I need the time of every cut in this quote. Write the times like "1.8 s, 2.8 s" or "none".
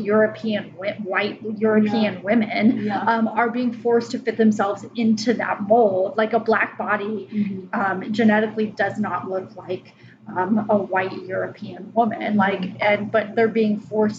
none